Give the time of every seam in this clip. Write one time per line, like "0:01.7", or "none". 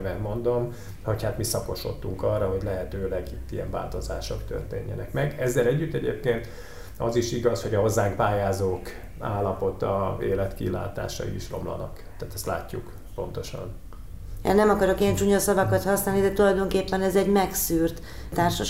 none